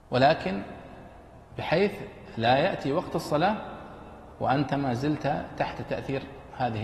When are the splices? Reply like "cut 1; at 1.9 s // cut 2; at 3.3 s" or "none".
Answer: cut 1; at 1.5 s